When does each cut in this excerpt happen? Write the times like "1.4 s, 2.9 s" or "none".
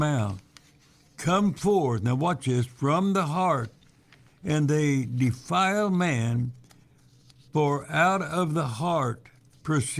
none